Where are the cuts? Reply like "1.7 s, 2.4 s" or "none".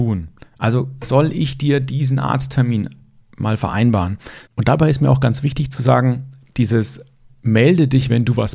4.5 s